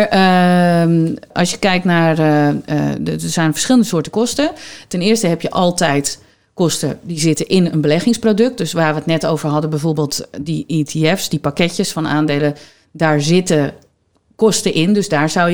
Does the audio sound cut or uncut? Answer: uncut